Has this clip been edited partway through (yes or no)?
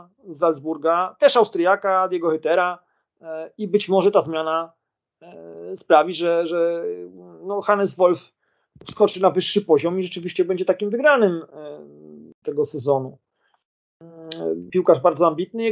yes